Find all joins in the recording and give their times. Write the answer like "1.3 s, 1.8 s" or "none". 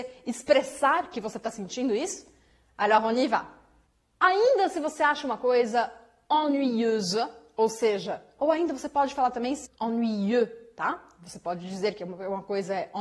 8.4 s, 9.7 s